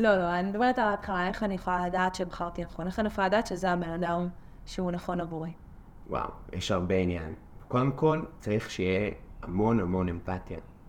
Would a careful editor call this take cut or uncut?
cut